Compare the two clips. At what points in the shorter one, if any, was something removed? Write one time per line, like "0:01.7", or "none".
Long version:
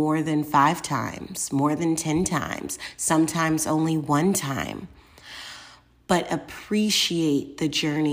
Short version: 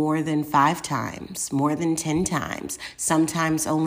none